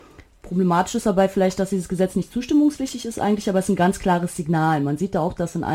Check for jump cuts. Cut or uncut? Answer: uncut